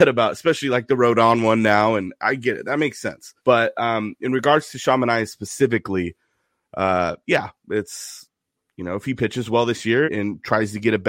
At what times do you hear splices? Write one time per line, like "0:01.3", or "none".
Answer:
0:03.4
0:10.0